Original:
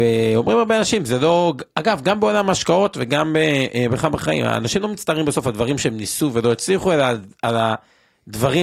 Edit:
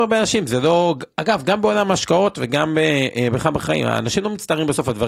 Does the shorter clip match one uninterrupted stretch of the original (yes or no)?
yes